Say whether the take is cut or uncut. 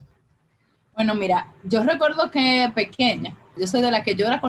cut